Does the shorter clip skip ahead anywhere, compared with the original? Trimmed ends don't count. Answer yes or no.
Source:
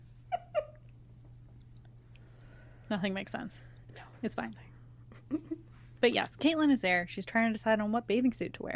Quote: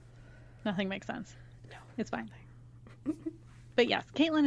no